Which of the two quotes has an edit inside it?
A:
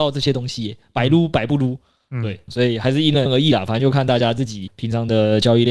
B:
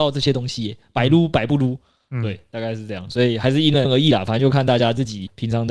A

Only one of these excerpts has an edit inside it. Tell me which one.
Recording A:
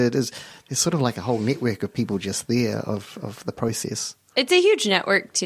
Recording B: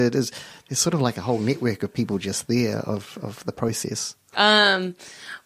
B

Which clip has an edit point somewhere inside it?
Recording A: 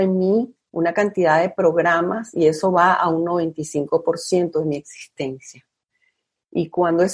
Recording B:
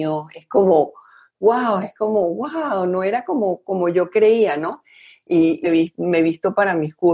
B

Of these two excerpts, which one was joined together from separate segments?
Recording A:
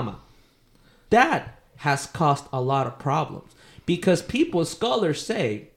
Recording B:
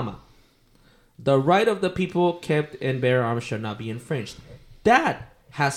A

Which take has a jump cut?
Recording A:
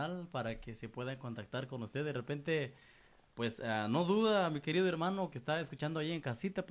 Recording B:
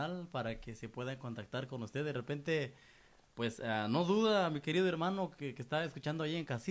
A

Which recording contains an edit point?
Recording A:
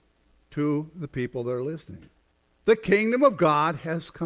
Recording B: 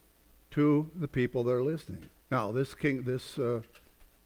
B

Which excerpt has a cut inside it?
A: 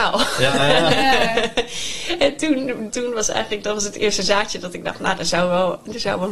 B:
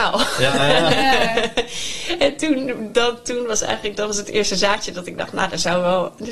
A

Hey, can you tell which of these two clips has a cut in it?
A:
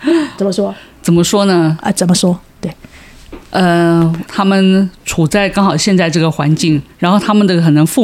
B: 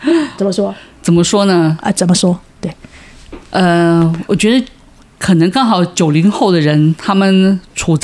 A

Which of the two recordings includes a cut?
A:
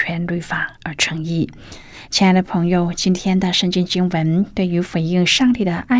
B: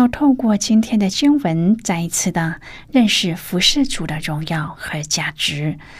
A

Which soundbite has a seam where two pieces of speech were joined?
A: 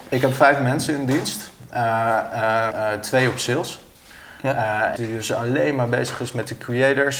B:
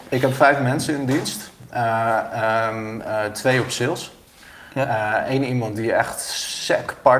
A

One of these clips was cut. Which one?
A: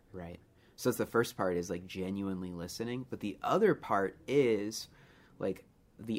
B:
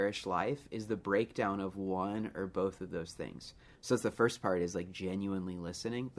B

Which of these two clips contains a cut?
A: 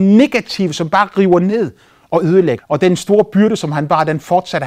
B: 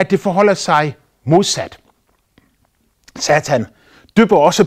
A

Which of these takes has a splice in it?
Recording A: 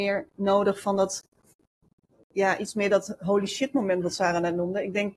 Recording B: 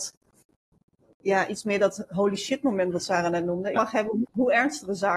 B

